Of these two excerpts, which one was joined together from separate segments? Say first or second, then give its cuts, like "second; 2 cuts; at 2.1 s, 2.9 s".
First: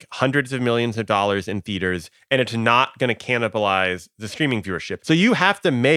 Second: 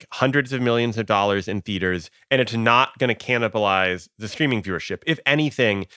first; 1 cut; at 5.0 s